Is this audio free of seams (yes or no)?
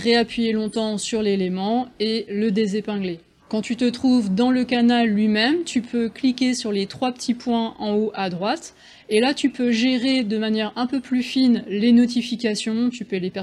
yes